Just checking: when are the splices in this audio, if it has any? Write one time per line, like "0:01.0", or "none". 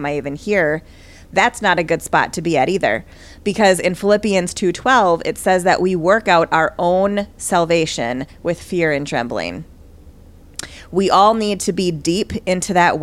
none

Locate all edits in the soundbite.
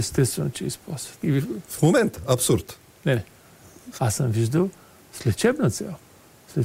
0:01.2
0:03.9

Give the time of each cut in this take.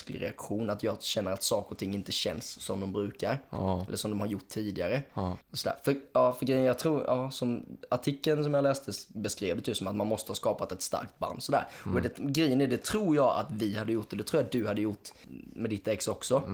0:05.4

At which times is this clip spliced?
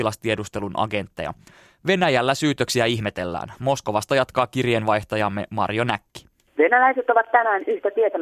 none

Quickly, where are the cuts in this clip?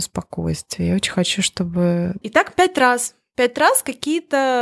0:02.2

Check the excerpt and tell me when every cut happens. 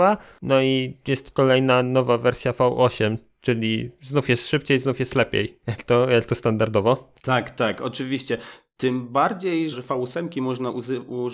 0:07.1
0:09.7

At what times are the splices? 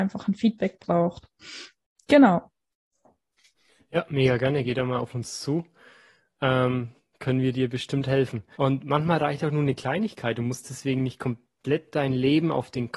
0:07.1
0:08.5

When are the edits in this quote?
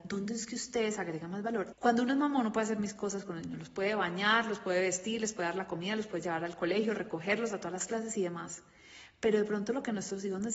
0:01.7

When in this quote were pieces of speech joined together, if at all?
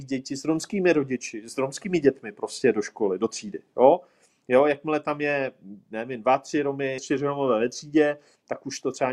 0:07.0

